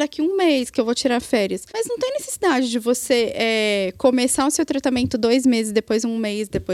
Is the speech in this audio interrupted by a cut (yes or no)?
yes